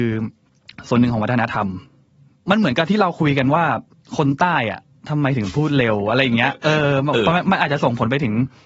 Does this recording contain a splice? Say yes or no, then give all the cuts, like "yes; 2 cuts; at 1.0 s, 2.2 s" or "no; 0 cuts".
no; 0 cuts